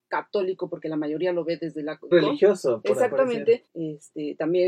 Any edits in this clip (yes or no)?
yes